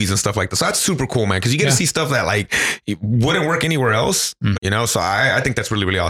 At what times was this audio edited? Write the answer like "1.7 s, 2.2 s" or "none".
4.5 s